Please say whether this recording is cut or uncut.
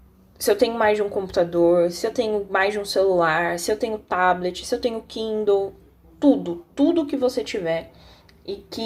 uncut